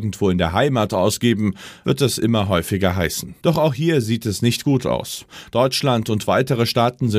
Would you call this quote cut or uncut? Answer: cut